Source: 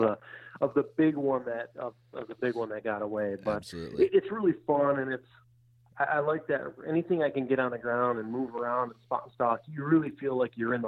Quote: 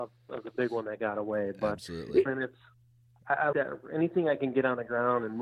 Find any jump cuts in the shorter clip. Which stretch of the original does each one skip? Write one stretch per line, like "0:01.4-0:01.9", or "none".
0:04.1-0:05.0
0:06.2-0:06.5